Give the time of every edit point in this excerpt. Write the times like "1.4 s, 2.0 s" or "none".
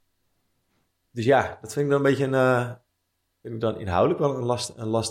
none